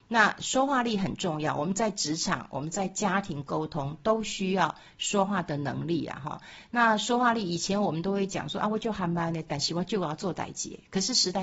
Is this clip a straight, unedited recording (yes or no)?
yes